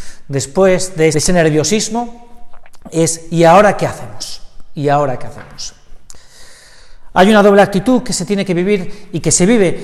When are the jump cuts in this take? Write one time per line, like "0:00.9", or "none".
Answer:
0:01.1